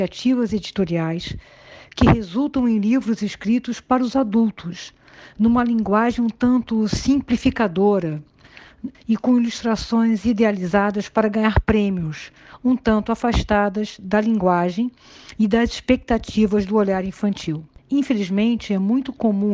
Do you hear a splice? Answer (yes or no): yes